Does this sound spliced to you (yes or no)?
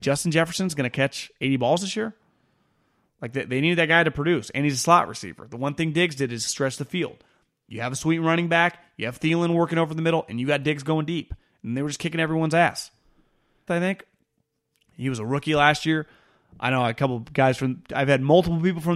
yes